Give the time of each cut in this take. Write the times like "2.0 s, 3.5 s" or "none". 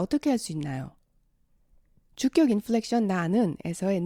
none